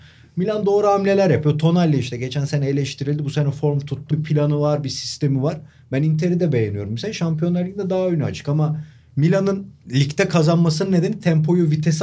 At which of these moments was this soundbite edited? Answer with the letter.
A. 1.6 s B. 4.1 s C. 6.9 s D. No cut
B